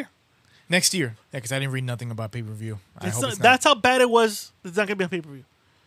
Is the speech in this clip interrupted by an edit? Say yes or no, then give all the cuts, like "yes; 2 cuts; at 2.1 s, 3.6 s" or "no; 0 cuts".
yes; 1 cut; at 1.2 s